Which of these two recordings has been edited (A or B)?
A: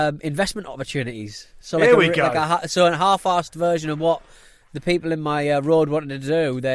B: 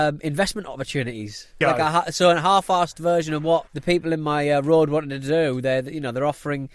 B